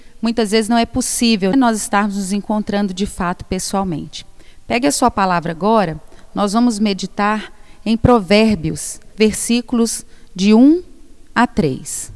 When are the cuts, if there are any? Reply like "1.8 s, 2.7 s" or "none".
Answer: 1.5 s, 9.1 s